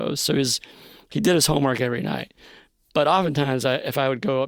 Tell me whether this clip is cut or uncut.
uncut